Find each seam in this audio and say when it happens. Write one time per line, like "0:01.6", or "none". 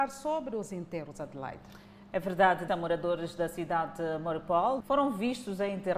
0:02.7
0:04.8